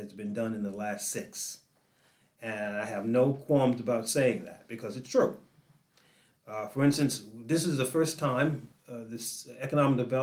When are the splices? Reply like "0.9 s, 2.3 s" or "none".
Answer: 8.7 s